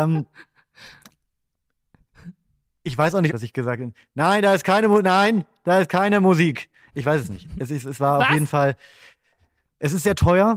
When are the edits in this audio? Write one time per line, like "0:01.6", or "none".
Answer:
0:03.3